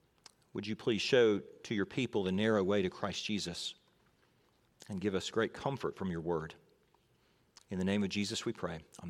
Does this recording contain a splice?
no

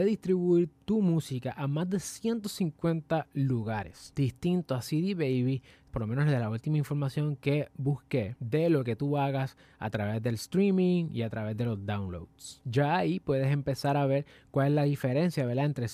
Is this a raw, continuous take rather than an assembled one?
no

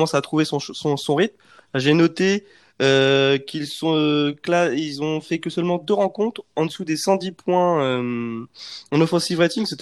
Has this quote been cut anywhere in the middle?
no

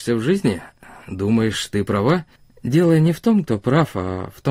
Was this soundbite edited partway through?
no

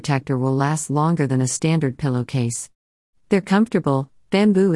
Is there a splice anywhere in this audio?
yes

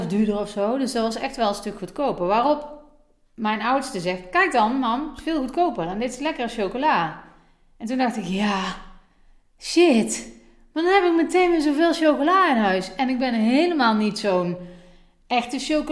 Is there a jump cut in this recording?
no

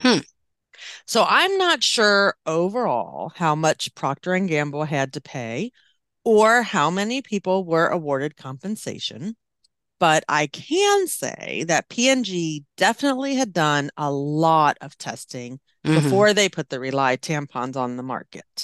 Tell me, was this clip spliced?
no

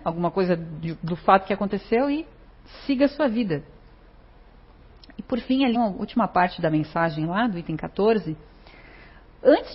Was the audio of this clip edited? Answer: yes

